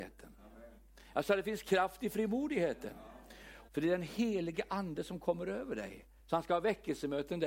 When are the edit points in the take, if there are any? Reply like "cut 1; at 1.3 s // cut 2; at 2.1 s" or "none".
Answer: cut 1; at 3.7 s // cut 2; at 6.2 s